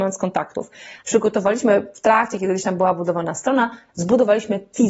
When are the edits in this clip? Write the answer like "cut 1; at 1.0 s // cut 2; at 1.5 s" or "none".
cut 1; at 1.0 s